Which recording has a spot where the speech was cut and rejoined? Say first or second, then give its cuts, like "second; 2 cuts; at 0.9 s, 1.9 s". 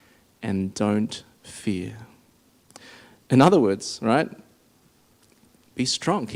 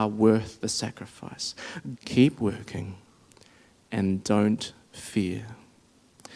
second; 1 cut; at 1.9 s